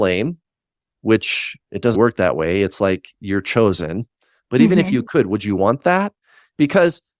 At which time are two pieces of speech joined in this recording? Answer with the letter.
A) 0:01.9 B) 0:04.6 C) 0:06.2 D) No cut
A